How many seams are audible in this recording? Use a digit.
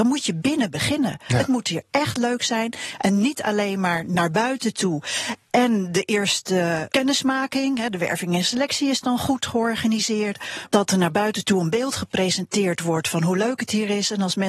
2